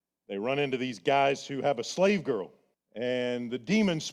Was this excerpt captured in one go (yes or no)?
no